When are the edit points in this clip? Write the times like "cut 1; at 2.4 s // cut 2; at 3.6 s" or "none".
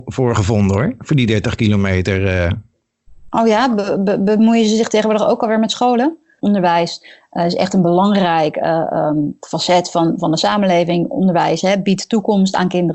cut 1; at 6.4 s